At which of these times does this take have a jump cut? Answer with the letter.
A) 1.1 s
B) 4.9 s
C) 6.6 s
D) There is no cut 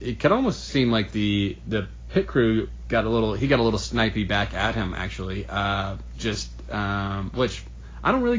D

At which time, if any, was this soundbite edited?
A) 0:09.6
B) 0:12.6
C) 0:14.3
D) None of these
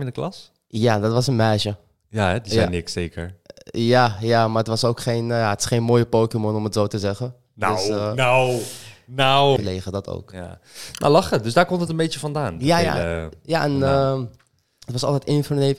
A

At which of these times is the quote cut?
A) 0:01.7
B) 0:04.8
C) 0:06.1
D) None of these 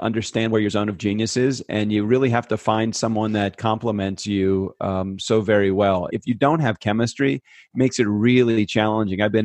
C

